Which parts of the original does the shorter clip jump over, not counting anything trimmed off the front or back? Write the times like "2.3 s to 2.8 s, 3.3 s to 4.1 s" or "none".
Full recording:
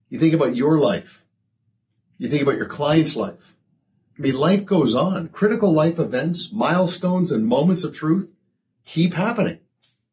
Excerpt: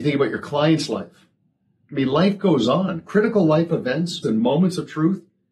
6.5 s to 7.3 s